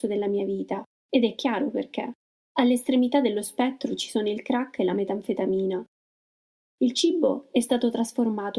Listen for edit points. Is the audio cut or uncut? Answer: cut